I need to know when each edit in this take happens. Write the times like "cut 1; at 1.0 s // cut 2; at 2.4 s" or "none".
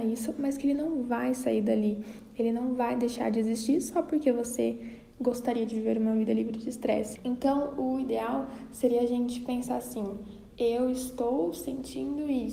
cut 1; at 7.2 s